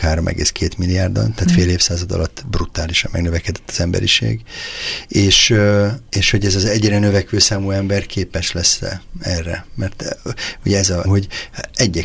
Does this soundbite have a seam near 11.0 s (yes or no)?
yes